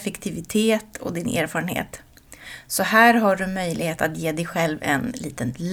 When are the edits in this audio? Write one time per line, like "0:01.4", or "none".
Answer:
none